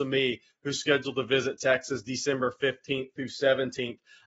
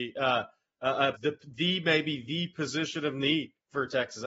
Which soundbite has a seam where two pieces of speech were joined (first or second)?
second